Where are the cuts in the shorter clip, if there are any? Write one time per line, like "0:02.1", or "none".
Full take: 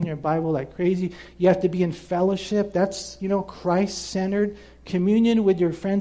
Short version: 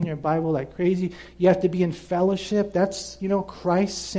none